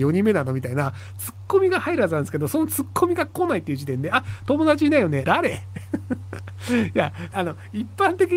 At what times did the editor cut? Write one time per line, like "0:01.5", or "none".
0:05.2
0:07.3

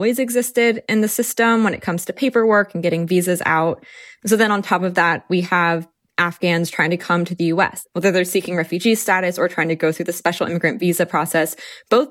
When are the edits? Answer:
none

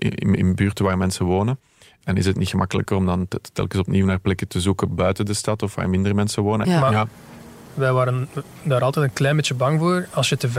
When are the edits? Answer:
0:06.6

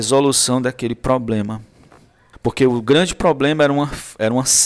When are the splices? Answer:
0:02.3

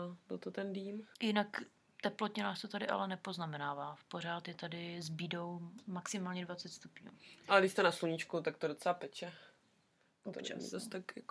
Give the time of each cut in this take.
0:01.1

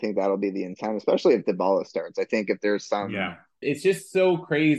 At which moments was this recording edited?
0:03.6

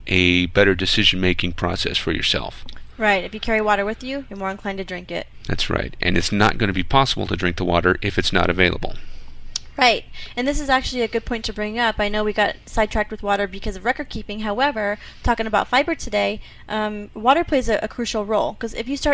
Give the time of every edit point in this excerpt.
none

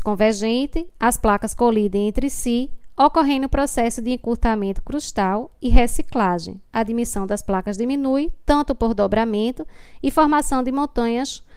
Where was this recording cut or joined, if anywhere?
none

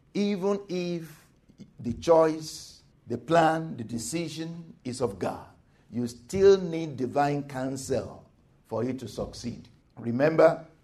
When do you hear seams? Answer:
none

